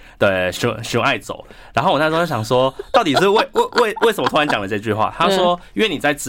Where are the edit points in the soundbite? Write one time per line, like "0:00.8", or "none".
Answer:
none